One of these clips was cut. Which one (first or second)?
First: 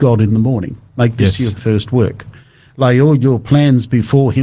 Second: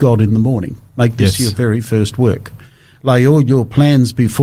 first